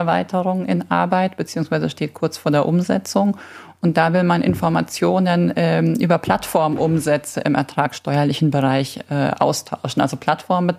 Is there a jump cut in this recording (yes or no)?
no